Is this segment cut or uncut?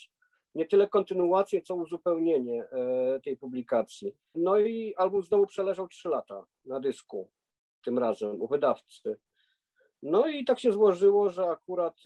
cut